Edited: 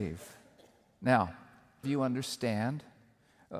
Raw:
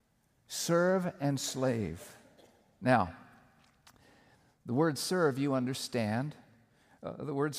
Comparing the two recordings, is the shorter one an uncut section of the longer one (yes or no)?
no